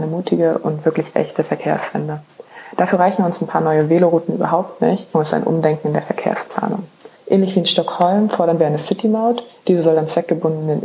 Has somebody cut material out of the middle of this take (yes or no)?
yes